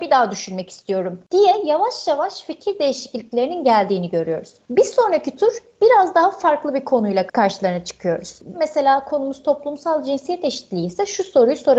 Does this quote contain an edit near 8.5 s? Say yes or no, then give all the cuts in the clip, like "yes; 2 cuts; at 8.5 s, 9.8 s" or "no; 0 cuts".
yes; 1 cut; at 8.5 s